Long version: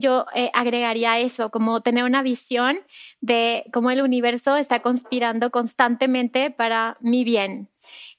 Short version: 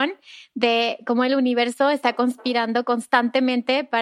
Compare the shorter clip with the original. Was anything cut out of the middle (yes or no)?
no